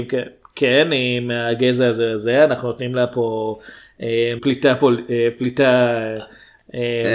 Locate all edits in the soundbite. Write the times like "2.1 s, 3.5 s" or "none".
4.4 s